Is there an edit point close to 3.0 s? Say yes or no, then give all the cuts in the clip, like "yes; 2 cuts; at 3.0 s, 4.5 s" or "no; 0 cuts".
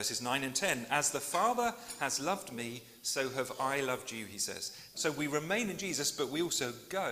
no; 1 cut; at 4.9 s